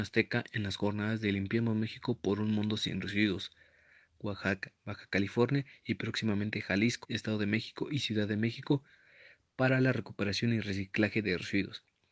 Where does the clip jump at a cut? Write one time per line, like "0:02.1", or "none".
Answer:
0:04.1
0:07.0